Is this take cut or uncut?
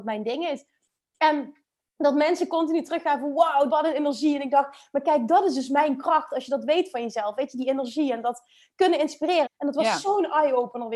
cut